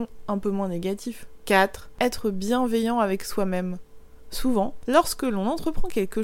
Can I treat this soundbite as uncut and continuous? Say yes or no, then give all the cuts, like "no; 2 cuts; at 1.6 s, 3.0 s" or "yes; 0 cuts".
yes; 0 cuts